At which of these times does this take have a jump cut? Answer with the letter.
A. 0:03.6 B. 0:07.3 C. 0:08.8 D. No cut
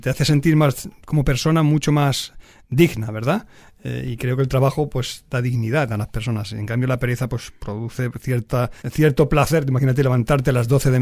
C